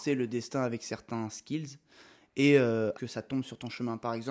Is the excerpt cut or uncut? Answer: cut